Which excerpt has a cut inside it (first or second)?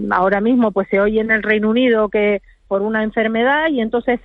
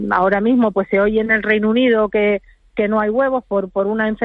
first